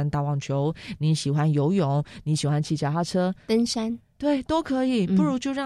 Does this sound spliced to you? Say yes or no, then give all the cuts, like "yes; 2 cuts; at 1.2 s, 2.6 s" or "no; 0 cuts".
no; 0 cuts